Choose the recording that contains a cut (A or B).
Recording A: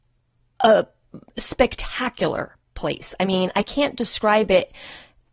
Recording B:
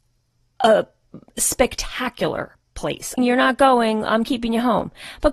B